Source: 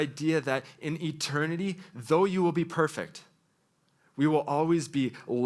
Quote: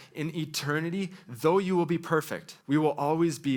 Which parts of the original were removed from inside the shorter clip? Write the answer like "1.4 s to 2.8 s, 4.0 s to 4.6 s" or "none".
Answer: 3.3 s to 4.1 s